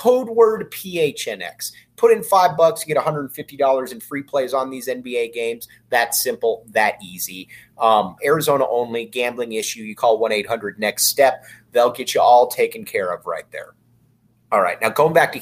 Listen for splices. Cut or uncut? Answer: cut